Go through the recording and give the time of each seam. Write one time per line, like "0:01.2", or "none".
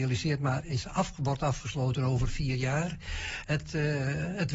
0:03.4